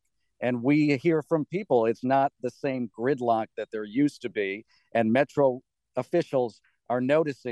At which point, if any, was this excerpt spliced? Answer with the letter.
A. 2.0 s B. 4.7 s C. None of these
A